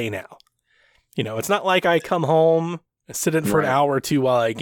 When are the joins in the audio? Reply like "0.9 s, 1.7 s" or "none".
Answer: none